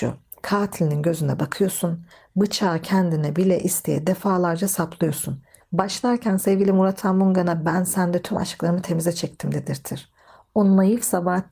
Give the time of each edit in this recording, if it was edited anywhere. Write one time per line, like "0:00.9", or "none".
0:05.6